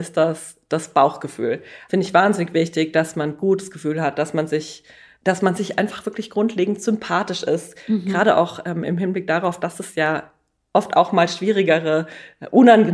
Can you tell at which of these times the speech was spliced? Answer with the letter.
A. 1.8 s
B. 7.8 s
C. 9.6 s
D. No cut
D